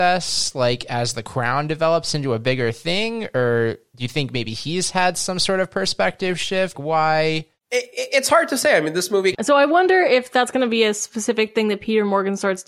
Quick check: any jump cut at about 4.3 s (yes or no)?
no